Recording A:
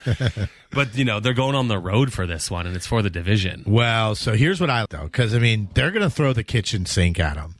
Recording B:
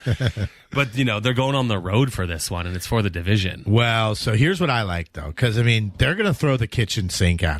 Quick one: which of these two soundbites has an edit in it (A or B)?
A